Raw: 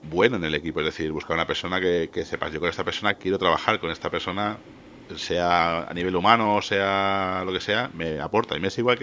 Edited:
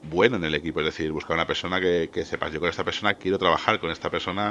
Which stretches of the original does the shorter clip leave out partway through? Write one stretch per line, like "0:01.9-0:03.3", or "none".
none

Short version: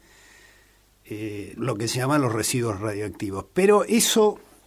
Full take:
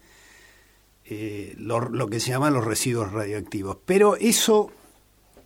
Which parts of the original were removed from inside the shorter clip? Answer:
0:01.6-0:01.9

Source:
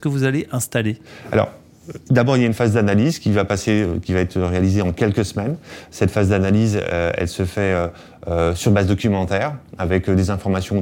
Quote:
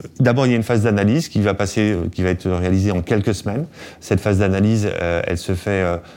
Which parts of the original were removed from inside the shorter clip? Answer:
none

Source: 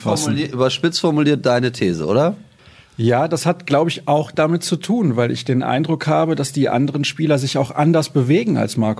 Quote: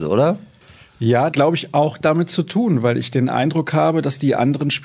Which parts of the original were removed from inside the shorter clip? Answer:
0:03.3-0:03.7

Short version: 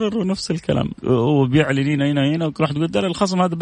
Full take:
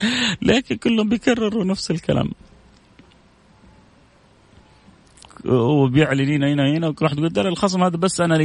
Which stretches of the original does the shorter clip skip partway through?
0:02.4-0:05.4

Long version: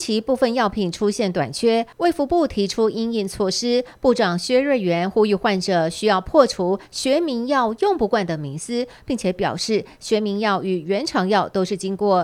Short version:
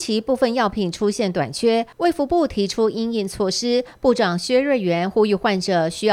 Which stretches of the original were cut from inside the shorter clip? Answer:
none

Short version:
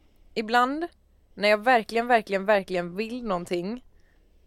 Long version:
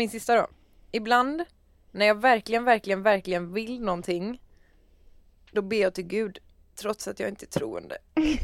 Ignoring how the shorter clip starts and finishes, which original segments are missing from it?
none

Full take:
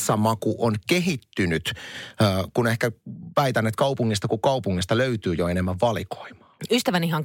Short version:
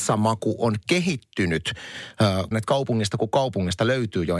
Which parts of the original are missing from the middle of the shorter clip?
0:02.5-0:03.6

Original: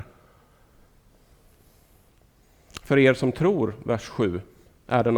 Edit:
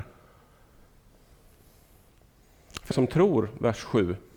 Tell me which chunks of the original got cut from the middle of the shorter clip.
0:02.9-0:03.2

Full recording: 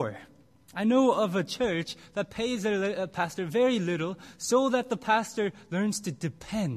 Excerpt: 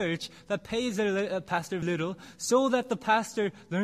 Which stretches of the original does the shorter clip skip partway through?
0:03.5-0:03.8

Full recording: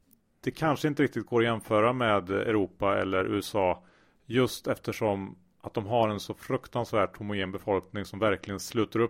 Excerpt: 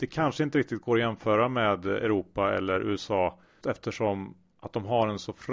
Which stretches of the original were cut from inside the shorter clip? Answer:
0:04.1-0:04.6

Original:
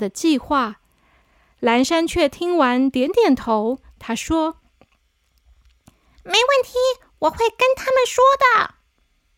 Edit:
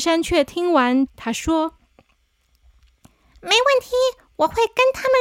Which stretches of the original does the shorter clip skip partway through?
0:02.9-0:03.9

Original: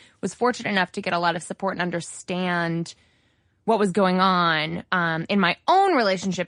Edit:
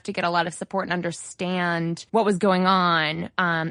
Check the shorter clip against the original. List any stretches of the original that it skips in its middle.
0:03.0-0:03.6

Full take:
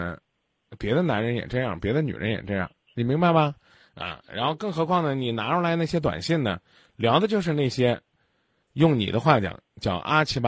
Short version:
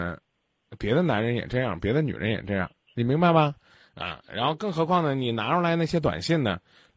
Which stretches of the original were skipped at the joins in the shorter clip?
none

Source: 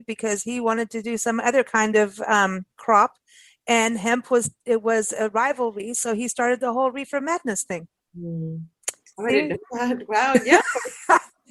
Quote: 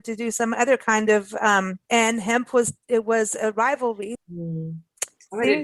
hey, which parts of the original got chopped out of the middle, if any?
0:02.7-0:03.6
0:05.9-0:08.0

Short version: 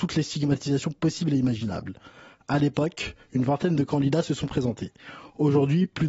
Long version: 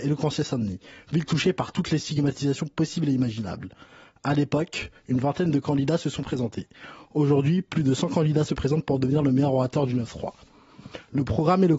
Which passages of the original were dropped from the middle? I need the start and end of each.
none

